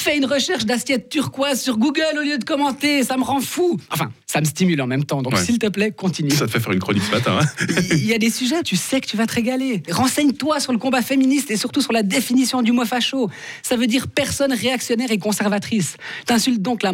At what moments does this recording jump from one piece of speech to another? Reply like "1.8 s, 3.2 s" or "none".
4.2 s, 8.6 s, 9.9 s